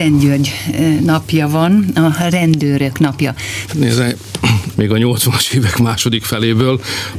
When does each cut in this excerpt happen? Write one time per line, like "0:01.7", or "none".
0:03.7
0:04.7